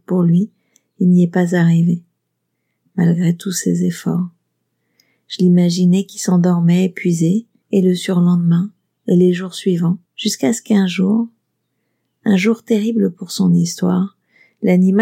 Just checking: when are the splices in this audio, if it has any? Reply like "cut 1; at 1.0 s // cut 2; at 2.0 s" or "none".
cut 1; at 7.6 s // cut 2; at 10.1 s